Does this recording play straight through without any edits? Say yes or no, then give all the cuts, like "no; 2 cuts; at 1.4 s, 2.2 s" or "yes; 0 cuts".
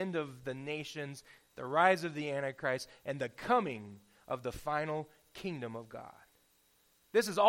yes; 0 cuts